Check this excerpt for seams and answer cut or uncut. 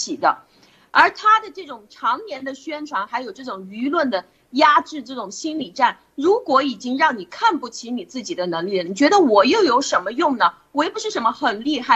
uncut